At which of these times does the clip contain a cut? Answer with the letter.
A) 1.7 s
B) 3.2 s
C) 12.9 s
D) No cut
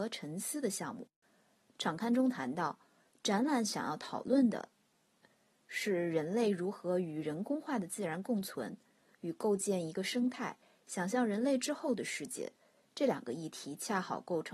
A